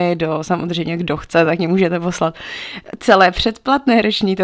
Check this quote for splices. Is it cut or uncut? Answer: uncut